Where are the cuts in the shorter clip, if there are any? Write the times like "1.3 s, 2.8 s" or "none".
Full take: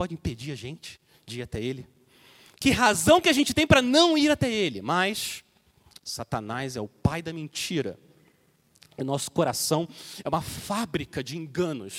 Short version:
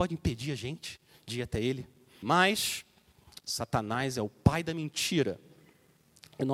2.2 s